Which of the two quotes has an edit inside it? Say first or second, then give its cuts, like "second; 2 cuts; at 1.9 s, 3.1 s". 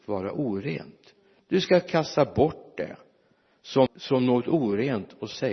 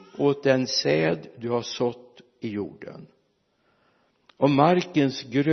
first; 1 cut; at 3.9 s